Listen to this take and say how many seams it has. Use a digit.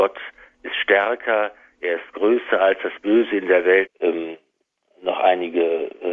1